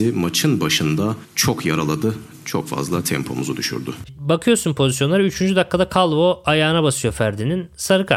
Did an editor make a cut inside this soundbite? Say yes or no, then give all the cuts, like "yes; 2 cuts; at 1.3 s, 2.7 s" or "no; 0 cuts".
no; 0 cuts